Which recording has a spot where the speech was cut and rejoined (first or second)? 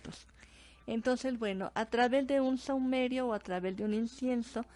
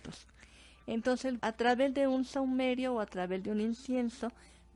second